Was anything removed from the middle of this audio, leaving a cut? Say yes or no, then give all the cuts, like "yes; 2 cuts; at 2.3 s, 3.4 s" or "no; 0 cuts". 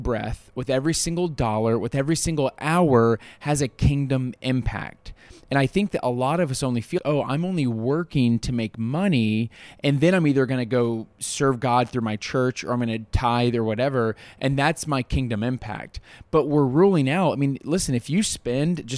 yes; 1 cut; at 7.0 s